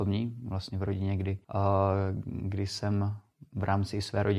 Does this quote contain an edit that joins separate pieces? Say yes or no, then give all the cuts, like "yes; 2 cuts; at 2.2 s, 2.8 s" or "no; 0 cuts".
yes; 1 cut; at 1.4 s